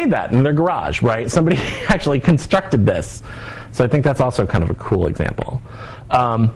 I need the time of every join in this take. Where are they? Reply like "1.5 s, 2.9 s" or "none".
none